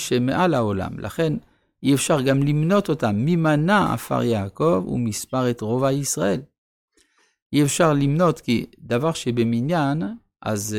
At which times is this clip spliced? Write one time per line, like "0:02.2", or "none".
none